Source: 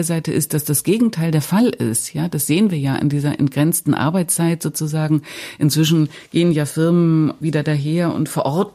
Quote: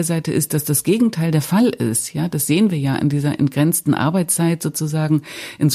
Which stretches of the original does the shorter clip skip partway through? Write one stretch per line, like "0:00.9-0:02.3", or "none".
none